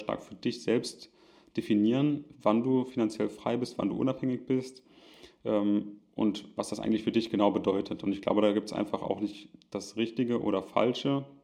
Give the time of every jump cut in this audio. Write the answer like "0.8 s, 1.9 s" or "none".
none